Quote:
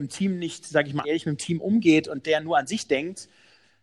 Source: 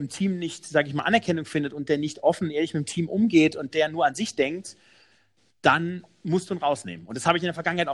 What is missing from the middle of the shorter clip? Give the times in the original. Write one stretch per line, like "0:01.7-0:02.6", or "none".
0:01.0-0:02.5